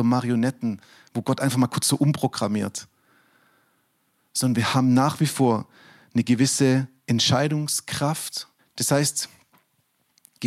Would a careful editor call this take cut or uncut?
cut